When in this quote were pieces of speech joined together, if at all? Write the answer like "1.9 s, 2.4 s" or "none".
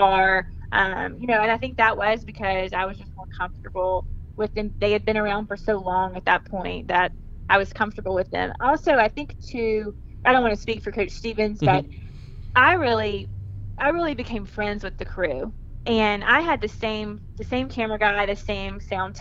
10.2 s